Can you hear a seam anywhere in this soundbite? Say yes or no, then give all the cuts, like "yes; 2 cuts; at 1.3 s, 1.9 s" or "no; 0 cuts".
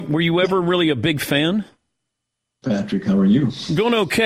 yes; 1 cut; at 2.6 s